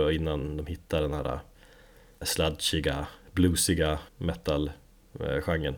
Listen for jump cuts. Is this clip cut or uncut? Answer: cut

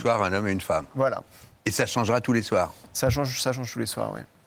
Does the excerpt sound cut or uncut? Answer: uncut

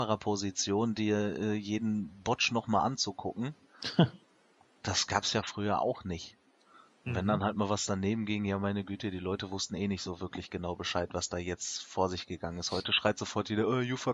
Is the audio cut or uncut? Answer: uncut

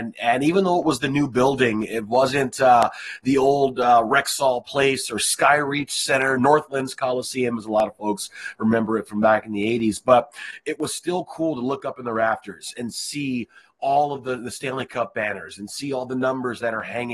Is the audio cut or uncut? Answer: uncut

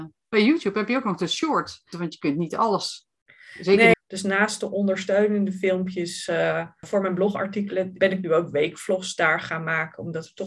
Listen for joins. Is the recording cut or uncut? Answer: cut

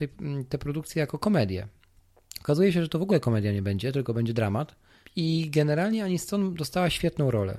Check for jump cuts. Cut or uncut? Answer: uncut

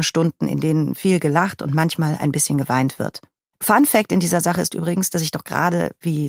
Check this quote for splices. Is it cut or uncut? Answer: cut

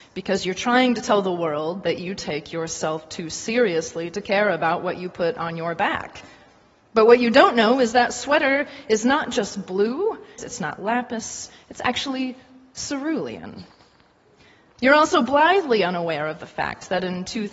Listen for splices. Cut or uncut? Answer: cut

